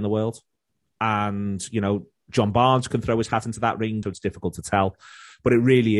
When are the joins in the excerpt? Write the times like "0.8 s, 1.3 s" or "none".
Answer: 4.0 s